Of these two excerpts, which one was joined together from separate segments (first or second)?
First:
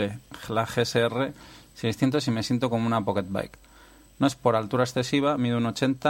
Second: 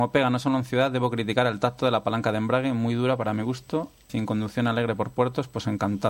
second